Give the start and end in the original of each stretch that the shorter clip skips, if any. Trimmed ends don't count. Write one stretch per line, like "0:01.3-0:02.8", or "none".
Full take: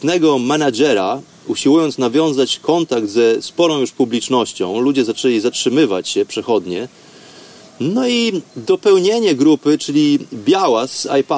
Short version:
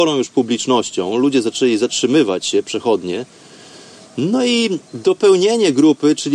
none